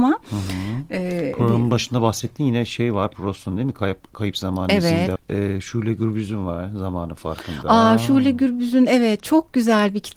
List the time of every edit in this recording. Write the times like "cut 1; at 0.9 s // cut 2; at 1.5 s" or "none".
cut 1; at 5.2 s